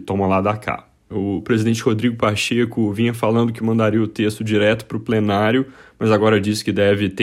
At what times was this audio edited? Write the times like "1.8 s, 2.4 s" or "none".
1.1 s